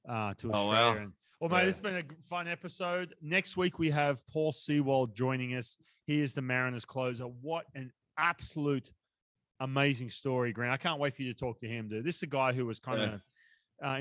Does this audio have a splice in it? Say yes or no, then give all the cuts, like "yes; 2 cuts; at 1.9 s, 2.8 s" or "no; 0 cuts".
yes; 1 cut; at 1.3 s